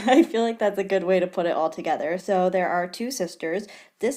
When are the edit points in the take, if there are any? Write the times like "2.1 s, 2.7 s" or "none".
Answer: none